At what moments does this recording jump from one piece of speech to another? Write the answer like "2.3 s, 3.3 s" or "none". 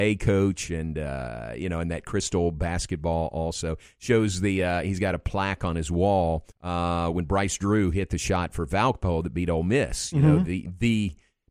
6.5 s